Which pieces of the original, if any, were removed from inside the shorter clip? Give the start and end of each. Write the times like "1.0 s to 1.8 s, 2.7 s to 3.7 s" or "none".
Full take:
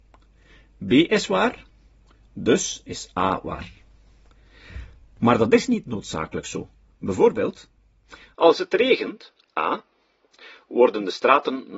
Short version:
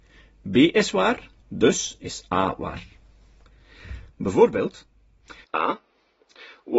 1.7 s to 2.2 s, 4.9 s to 6.9 s, 8.3 s to 9.5 s